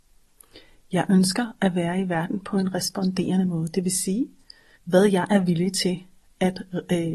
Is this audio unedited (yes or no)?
no